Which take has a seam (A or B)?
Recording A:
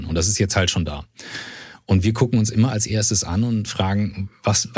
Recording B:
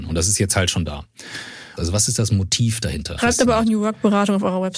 B